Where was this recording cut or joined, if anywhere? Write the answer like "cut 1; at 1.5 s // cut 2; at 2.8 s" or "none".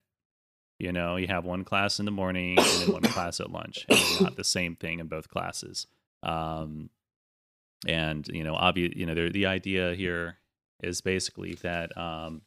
cut 1; at 6.1 s // cut 2; at 9.3 s